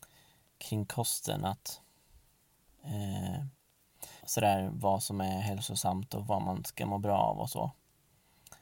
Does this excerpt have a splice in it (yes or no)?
yes